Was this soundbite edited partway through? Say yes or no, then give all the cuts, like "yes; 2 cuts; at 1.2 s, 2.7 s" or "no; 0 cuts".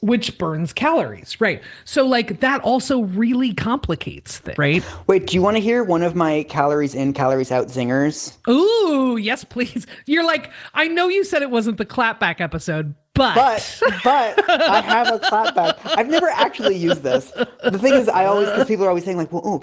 yes; 1 cut; at 4.6 s